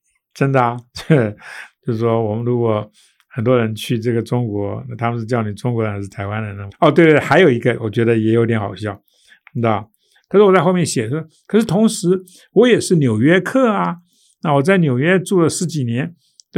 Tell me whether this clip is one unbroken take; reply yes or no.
no